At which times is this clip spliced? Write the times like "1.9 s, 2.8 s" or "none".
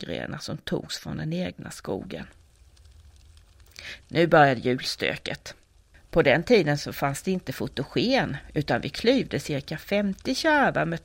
4.0 s, 5.9 s